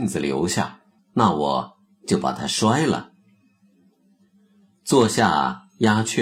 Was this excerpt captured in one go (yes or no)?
no